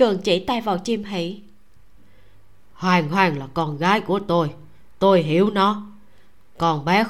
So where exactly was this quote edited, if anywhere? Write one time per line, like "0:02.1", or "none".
none